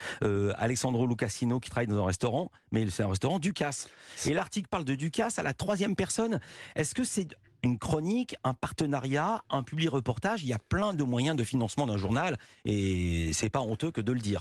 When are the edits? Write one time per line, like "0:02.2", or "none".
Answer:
none